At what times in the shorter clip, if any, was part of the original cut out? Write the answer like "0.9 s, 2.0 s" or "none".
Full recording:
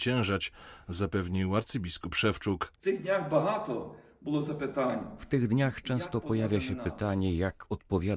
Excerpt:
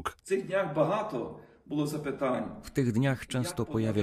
none